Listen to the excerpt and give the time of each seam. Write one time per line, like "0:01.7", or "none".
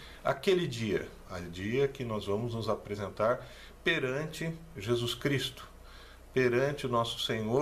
0:01.2